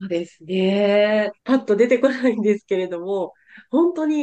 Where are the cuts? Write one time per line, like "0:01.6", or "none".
0:01.4